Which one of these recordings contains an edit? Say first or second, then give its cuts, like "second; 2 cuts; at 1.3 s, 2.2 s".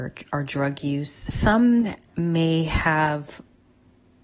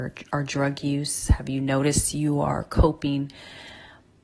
first; 1 cut; at 1.3 s